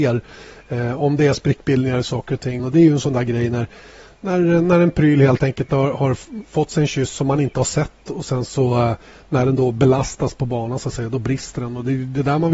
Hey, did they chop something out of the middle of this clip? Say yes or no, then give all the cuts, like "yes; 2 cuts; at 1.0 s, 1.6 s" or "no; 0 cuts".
yes; 1 cut; at 2.6 s